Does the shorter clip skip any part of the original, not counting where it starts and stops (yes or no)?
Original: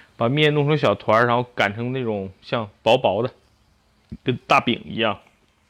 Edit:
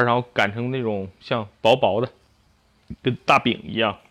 no